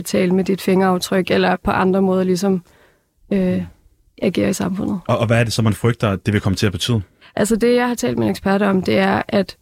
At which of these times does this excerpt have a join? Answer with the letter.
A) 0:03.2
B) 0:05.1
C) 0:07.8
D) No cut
D